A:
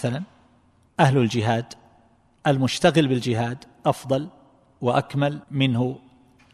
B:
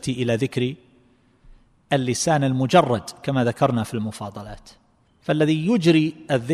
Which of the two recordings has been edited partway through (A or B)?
A